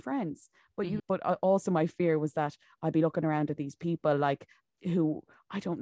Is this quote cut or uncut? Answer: cut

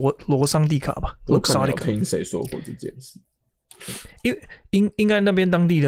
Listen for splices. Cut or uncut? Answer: uncut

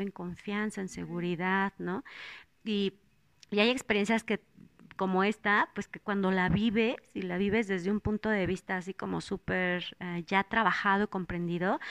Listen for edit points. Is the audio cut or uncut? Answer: uncut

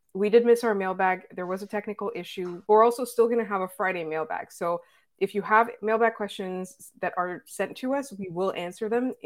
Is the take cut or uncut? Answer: cut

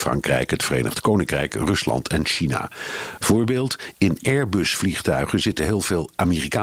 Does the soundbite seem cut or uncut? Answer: cut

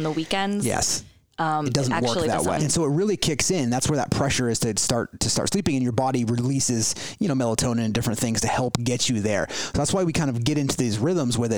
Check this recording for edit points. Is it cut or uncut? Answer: cut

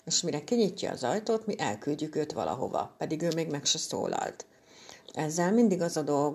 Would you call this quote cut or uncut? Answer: cut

